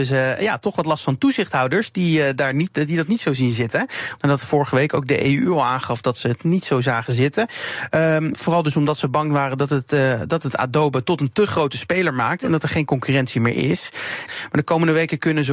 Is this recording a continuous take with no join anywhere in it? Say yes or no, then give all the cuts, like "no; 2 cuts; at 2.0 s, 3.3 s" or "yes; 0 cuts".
no; 3 cuts; at 4.2 s, 8.3 s, 14.2 s